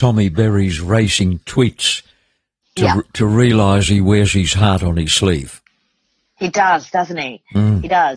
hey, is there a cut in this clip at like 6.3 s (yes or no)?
no